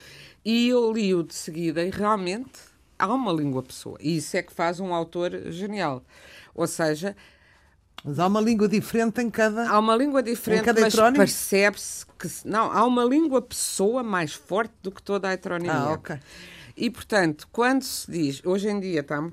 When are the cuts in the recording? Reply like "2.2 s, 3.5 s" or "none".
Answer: none